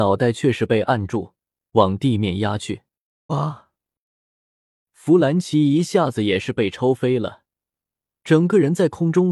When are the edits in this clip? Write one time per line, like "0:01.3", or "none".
0:03.3